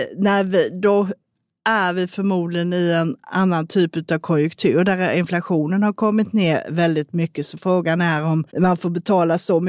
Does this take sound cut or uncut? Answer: cut